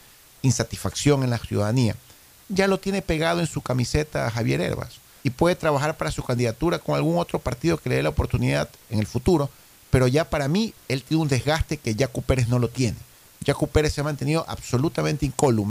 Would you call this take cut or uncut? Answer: cut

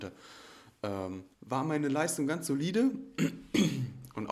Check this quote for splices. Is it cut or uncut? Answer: cut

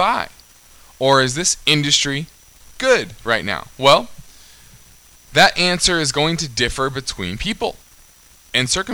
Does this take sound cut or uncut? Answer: uncut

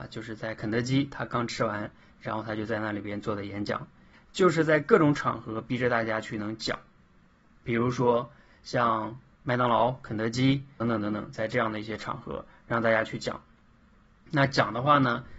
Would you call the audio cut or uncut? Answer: cut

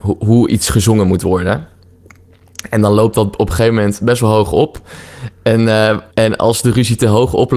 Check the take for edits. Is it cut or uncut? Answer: cut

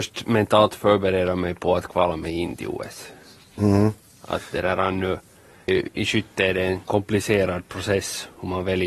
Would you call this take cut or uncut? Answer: cut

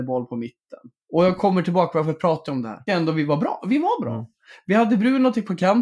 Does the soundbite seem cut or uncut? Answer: cut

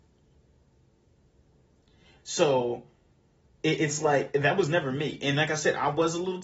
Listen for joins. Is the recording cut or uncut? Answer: uncut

